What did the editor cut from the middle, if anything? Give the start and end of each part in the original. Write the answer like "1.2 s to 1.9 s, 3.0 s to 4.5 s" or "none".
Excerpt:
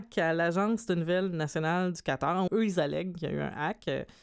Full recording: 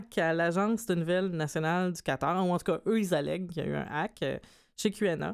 2.5 s to 2.8 s